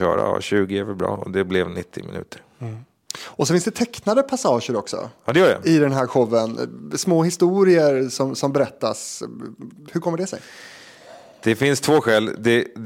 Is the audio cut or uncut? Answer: uncut